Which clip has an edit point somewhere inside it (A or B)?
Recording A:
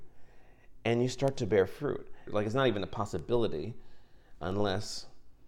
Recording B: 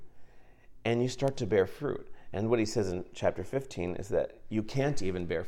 A